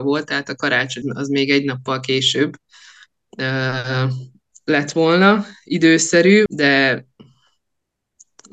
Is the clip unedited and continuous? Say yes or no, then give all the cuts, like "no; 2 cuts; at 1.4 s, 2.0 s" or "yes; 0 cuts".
no; 2 cuts; at 1.0 s, 6.5 s